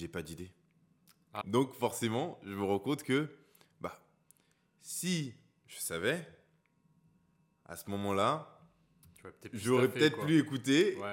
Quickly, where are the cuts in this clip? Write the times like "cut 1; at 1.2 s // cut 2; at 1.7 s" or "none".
cut 1; at 1.4 s